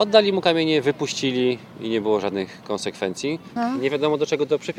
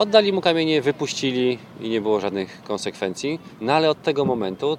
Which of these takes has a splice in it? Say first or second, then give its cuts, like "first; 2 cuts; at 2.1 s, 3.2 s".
first; 1 cut; at 3.6 s